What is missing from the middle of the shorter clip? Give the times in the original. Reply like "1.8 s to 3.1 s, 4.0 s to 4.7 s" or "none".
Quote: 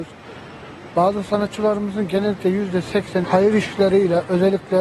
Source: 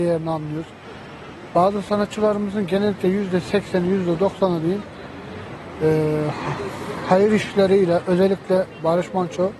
3.8 s to 7.0 s